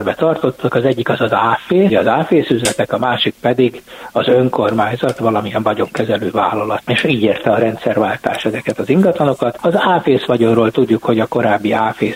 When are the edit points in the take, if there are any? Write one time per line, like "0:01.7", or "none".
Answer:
none